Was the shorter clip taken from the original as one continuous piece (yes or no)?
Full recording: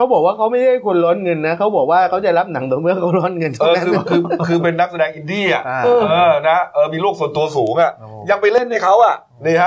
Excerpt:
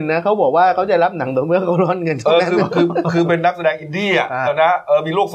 no